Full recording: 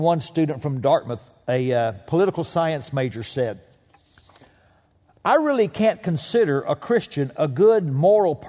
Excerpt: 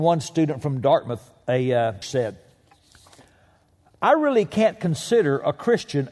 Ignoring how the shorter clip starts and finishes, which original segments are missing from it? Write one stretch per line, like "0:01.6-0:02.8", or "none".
0:02.0-0:03.2